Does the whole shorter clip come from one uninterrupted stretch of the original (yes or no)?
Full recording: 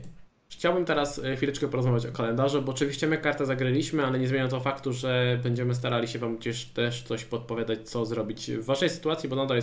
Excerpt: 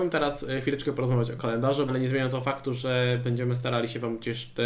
no